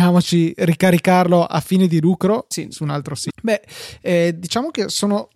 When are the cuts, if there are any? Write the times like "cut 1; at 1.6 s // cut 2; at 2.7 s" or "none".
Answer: cut 1; at 3.3 s